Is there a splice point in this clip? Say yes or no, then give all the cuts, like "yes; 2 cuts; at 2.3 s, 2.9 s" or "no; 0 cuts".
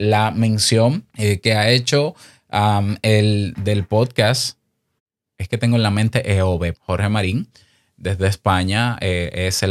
yes; 2 cuts; at 1.1 s, 6.7 s